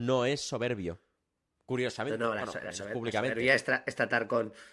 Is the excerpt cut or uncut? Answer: uncut